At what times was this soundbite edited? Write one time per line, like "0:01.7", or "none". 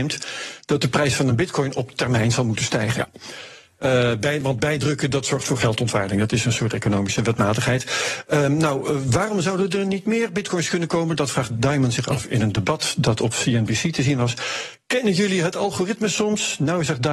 none